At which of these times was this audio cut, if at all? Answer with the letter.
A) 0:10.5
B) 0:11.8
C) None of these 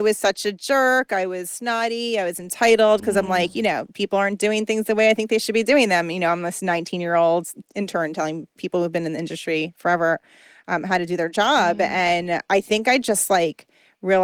C